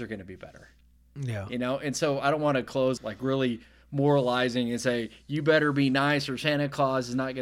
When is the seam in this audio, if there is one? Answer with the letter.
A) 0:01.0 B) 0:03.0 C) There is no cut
B